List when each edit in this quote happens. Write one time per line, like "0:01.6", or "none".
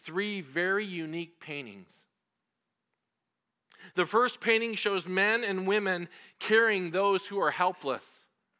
none